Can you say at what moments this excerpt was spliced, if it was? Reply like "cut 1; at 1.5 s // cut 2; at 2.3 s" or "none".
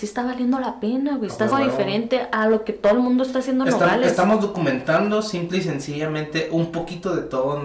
cut 1; at 1.5 s